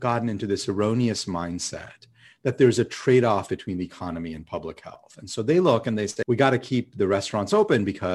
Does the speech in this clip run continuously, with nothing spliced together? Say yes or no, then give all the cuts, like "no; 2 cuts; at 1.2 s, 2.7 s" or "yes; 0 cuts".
no; 1 cut; at 6.2 s